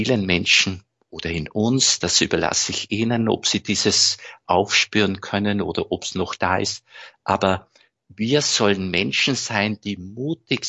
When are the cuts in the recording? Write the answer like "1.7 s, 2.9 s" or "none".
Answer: none